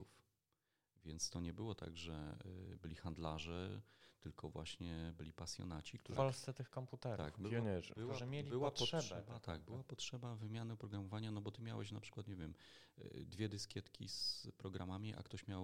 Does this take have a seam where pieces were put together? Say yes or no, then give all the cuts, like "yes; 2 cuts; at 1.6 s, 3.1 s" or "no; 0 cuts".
yes; 1 cut; at 6.2 s